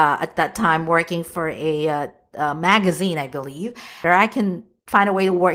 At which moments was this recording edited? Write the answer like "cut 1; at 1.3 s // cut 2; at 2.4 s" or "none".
cut 1; at 4.0 s